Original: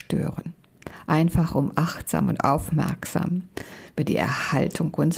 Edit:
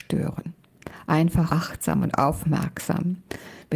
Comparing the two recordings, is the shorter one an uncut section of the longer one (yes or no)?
no